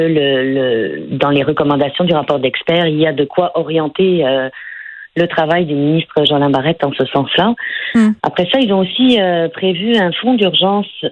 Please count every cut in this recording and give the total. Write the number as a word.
one